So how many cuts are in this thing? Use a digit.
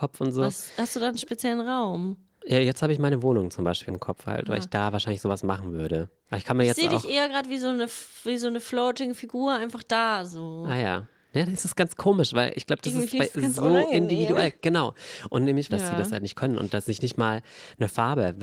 2